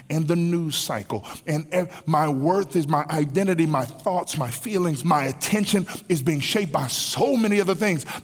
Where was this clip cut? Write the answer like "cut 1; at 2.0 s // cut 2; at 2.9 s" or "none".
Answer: cut 1; at 5.0 s